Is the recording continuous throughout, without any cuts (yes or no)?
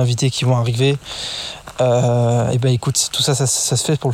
yes